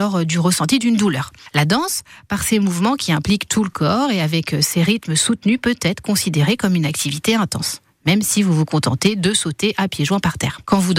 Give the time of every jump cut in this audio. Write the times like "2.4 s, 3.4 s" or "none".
none